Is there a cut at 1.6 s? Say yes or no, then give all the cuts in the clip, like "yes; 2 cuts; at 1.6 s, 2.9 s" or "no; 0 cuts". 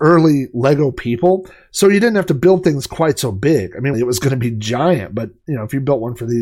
no; 1 cut; at 3.9 s